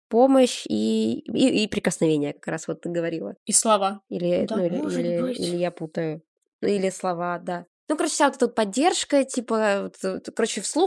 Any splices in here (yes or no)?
yes